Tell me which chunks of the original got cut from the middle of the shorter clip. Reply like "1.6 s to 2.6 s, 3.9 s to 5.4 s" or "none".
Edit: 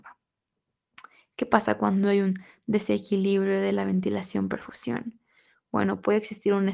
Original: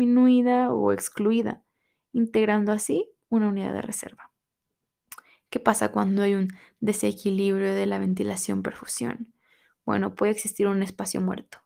none